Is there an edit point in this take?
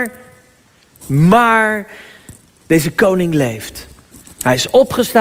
no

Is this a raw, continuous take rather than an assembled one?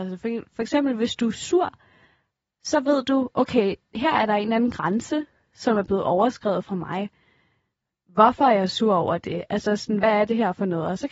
yes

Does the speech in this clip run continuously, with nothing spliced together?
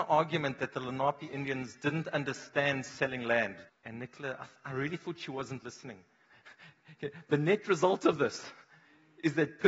no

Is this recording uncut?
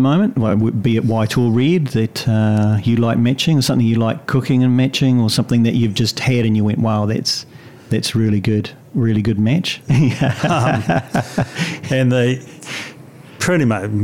no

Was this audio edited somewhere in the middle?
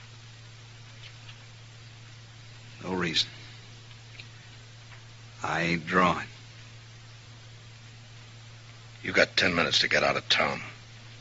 no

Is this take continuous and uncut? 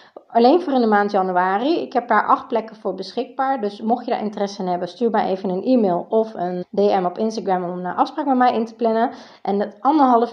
no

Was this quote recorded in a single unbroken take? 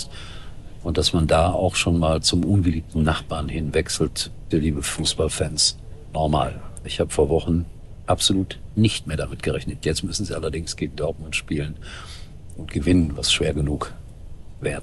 no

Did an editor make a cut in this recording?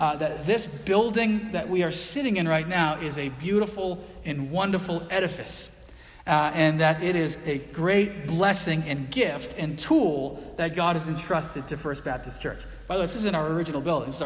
no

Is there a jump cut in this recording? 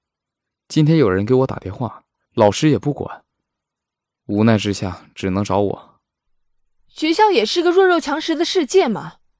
yes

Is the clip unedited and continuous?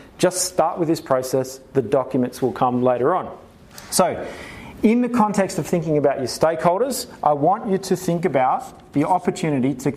yes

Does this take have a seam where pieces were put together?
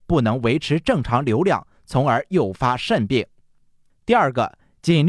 yes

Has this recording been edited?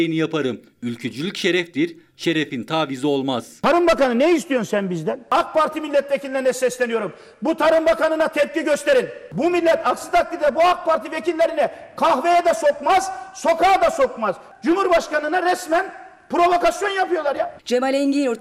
yes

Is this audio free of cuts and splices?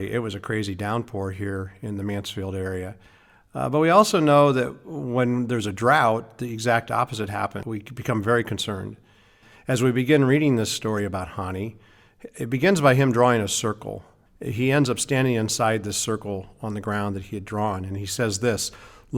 yes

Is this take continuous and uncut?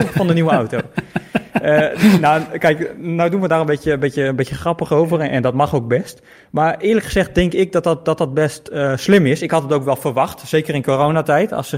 yes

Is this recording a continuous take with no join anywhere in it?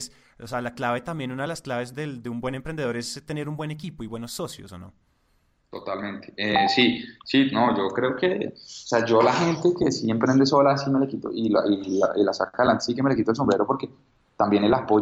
yes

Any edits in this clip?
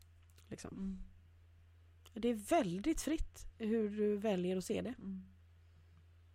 no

